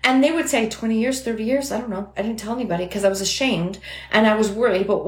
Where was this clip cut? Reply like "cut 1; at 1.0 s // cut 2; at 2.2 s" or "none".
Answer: none

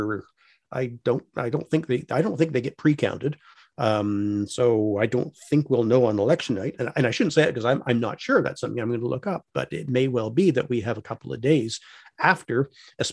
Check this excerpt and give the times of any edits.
none

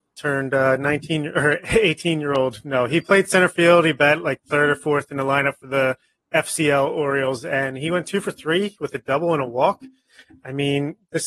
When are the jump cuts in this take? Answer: none

